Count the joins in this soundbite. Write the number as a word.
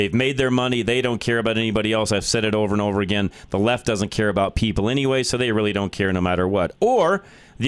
zero